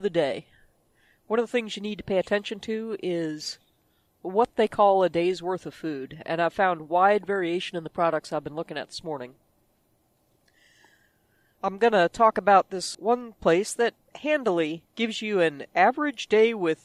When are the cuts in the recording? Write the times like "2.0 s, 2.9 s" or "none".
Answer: 12.9 s, 14.9 s